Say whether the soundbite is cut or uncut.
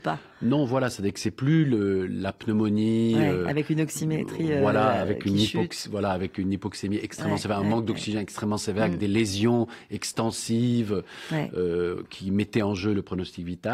uncut